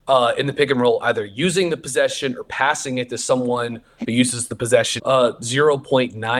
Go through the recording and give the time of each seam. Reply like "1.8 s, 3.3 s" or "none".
5.0 s